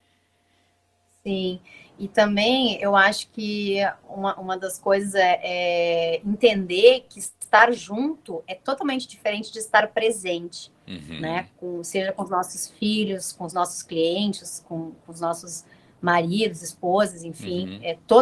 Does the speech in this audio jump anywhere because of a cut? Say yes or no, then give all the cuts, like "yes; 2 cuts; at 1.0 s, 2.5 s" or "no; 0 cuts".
no; 0 cuts